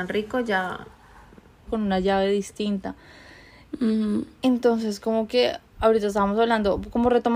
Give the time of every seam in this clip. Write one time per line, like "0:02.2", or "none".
0:01.7